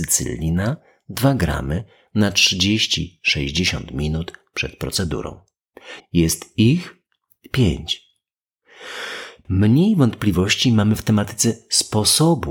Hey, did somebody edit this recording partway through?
yes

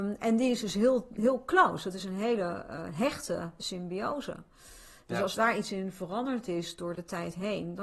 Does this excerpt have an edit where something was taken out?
no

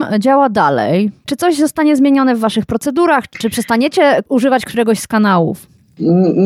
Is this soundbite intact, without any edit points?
no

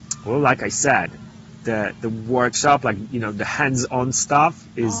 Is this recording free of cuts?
yes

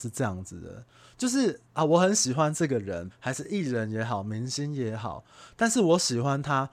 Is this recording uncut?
no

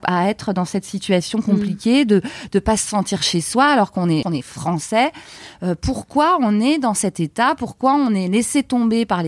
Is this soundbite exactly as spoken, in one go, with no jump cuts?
no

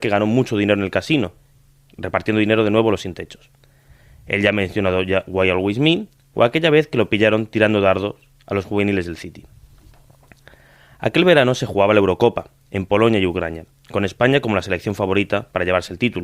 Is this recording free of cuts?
yes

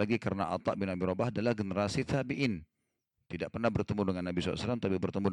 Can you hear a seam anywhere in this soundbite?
no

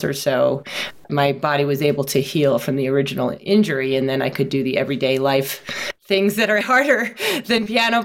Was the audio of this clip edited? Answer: yes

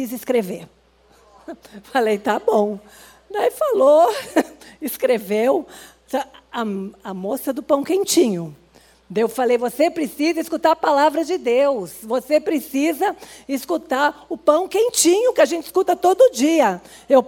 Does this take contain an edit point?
no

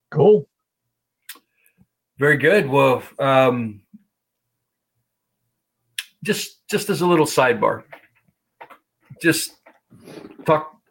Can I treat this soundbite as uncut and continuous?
yes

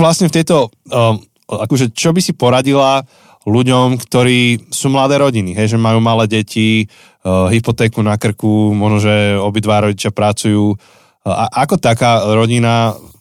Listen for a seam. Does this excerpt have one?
yes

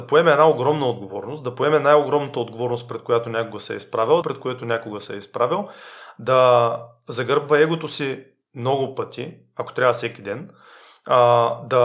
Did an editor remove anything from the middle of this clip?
yes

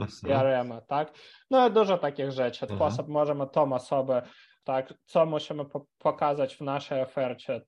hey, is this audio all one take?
no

